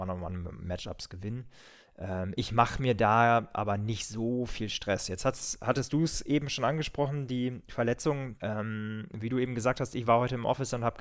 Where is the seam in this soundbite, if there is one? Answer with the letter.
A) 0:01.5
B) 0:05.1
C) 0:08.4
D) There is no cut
C